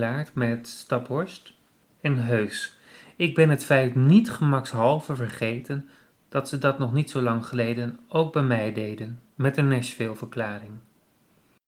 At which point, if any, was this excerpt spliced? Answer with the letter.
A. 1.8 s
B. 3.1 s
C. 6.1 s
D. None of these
A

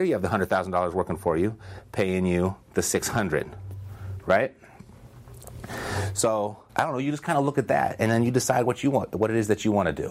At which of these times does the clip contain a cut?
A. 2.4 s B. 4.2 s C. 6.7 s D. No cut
C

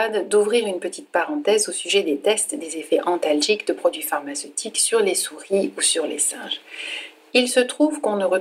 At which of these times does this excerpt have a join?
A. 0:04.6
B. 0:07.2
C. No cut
C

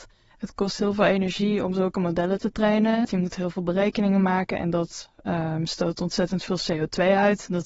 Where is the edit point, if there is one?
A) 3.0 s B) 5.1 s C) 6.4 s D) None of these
A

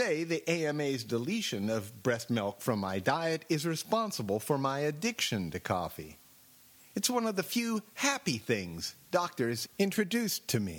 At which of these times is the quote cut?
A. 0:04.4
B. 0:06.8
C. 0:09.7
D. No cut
D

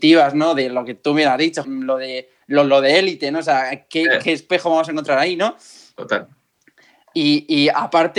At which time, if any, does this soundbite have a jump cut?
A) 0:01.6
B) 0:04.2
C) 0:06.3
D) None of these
A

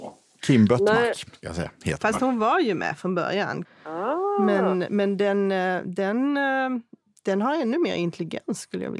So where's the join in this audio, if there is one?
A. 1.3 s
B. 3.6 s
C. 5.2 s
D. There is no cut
B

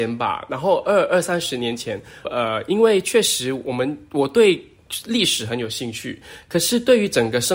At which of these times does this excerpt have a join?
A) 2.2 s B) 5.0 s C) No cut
A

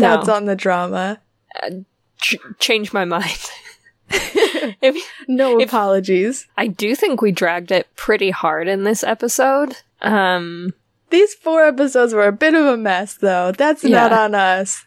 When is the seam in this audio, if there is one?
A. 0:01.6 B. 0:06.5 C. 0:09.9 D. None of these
B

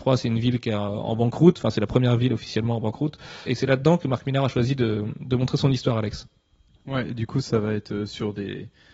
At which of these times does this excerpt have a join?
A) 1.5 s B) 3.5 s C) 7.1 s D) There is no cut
B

